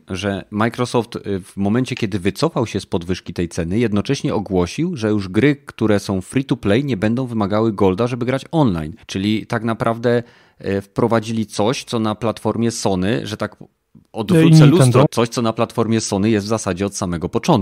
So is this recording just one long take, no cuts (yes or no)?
no